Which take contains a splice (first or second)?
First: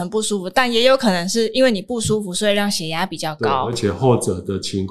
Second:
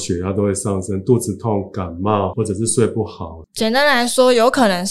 second